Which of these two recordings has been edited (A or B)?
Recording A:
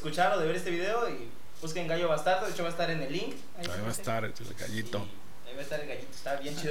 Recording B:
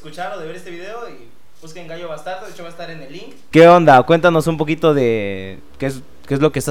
B